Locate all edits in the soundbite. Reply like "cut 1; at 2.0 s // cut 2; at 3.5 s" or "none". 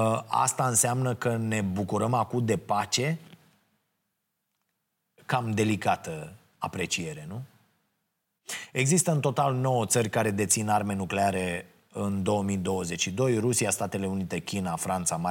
none